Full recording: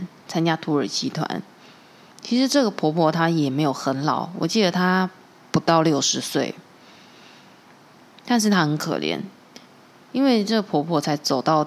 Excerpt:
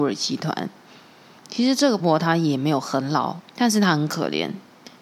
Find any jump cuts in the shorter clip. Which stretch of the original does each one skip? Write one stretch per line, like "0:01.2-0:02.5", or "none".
0:02.7-0:02.9
0:04.3-0:08.1